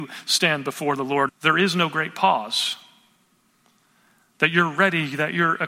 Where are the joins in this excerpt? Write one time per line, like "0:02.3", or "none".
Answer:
0:01.3